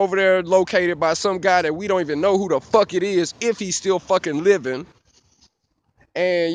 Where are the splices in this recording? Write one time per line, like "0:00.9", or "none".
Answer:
none